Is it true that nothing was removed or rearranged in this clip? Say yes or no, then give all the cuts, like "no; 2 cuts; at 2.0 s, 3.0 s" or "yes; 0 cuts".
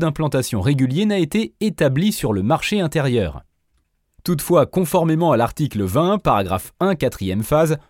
yes; 0 cuts